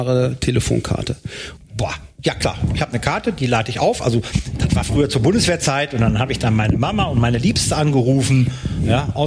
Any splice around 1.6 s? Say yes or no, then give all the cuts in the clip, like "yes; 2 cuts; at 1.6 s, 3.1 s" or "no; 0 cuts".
yes; 1 cut; at 1.6 s